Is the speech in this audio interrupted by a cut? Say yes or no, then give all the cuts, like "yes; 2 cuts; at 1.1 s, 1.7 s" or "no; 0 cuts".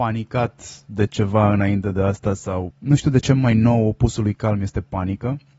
yes; 1 cut; at 2.7 s